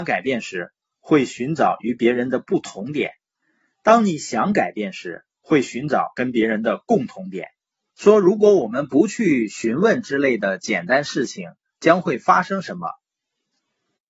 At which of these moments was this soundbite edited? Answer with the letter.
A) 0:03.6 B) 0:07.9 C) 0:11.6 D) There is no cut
B